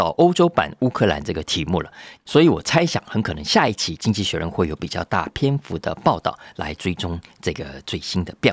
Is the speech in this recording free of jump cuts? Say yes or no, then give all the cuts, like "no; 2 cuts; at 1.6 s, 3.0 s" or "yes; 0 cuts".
no; 1 cut; at 2.2 s